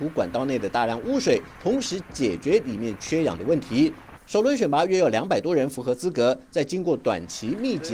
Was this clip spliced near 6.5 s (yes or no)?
no